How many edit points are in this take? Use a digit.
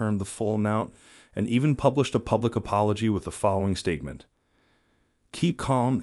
0